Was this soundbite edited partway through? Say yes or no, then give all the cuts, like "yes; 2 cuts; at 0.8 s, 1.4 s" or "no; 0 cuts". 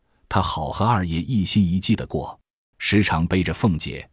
yes; 1 cut; at 2.7 s